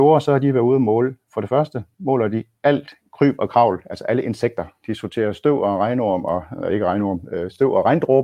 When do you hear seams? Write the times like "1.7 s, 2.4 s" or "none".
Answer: none